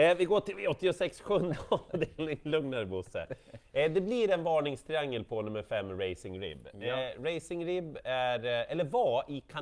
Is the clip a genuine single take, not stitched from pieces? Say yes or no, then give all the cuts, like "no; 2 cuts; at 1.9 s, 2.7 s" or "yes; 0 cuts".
yes; 0 cuts